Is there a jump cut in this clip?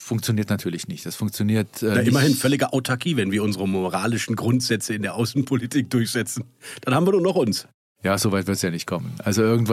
no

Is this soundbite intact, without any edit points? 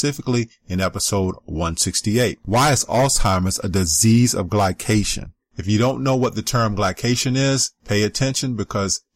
yes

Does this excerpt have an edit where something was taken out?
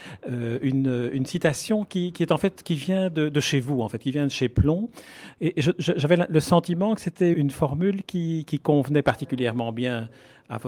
yes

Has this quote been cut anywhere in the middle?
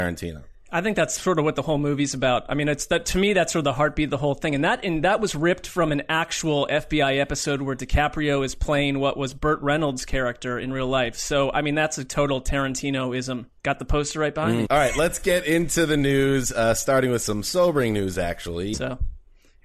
yes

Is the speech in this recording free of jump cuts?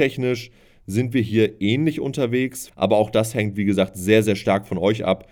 no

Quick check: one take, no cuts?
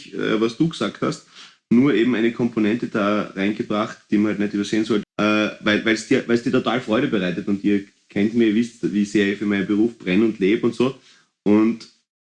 no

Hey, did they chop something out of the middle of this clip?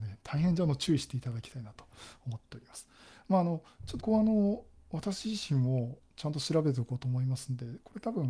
yes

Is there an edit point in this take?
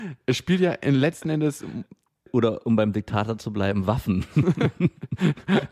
no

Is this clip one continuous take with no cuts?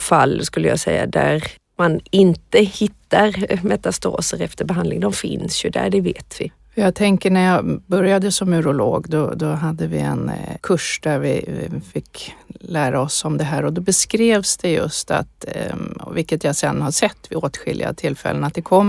no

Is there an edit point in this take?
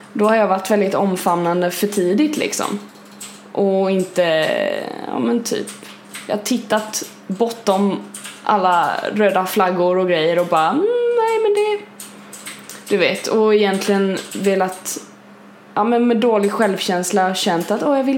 no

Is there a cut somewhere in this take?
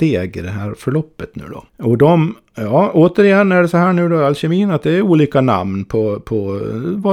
yes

